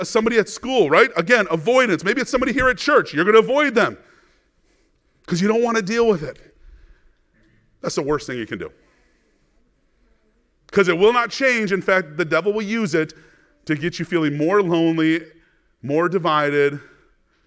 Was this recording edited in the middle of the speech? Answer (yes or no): no